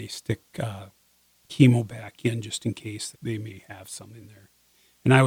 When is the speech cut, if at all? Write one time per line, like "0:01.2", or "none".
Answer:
0:03.1